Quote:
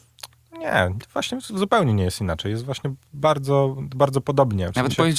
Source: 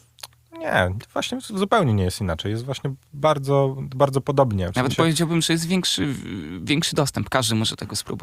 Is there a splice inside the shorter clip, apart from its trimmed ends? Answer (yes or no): no